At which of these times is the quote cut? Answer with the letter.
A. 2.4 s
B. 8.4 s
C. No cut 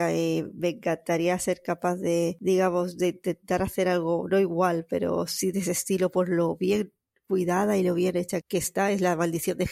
B